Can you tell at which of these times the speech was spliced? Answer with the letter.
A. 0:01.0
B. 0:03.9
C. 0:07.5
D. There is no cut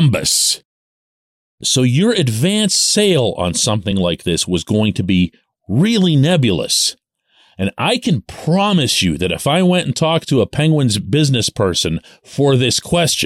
D